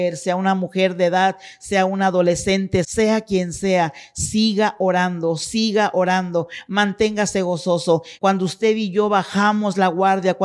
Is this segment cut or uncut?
cut